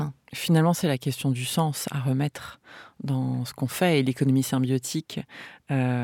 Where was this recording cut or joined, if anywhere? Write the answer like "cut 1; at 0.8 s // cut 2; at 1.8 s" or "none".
none